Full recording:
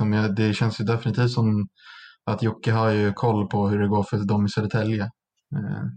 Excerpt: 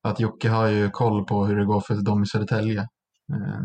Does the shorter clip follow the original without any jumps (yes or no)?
yes